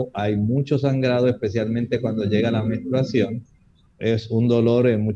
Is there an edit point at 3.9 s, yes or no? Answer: yes